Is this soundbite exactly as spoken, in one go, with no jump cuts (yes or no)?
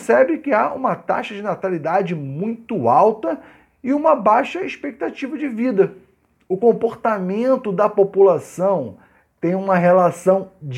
yes